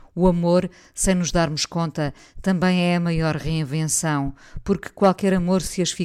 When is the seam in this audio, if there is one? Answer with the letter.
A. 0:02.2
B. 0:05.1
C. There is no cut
C